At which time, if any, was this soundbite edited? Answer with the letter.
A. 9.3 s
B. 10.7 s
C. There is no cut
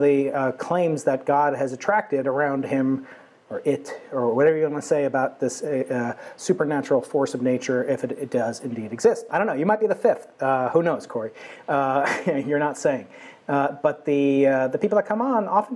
A